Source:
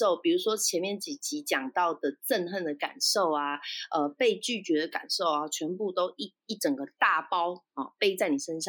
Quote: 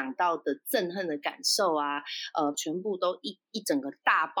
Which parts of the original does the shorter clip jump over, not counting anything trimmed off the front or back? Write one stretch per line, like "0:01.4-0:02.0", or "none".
0:04.1-0:05.5

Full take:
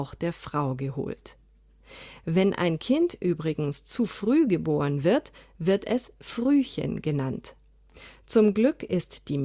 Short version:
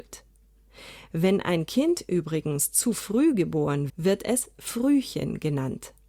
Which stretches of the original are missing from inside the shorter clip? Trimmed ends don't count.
0:05.0-0:05.5

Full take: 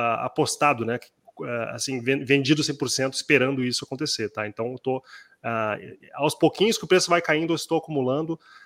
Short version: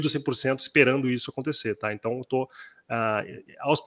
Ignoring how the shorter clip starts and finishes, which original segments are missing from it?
none

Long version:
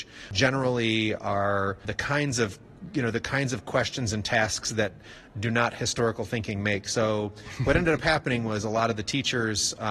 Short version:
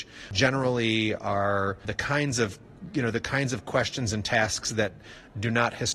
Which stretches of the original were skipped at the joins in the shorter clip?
none

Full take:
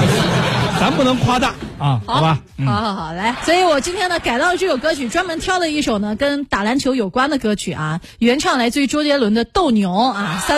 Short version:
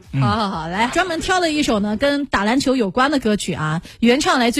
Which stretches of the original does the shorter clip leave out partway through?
0:03.4-0:05.1

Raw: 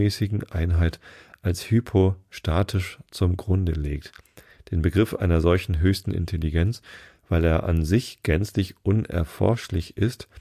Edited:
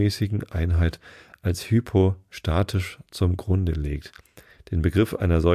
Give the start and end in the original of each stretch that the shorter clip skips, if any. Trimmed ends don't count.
none

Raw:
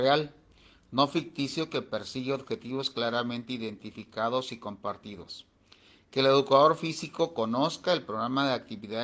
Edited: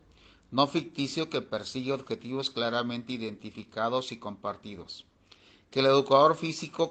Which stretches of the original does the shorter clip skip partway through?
none

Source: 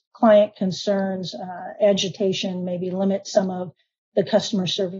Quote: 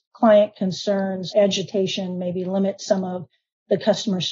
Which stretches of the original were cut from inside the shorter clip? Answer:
0:01.3-0:01.8

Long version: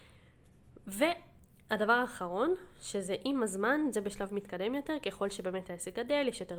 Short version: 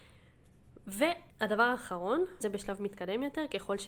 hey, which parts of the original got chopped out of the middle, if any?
0:01.3-0:01.6
0:02.7-0:03.9

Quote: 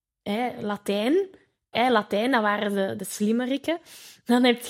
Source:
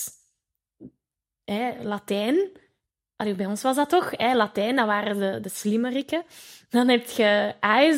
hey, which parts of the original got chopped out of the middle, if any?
0:02.9-0:04.2

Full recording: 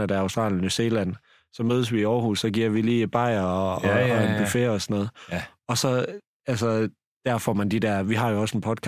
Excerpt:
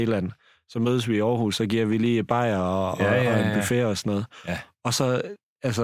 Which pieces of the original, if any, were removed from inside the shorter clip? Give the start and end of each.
none

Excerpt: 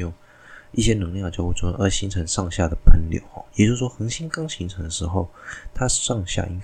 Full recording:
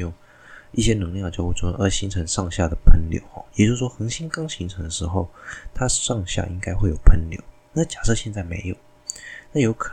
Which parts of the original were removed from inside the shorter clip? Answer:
none

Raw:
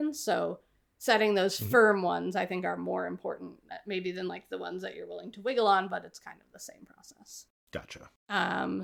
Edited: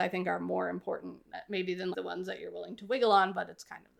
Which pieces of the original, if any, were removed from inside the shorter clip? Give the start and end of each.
0:04.3-0:04.5

